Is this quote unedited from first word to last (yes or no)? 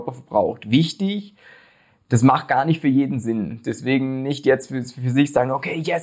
yes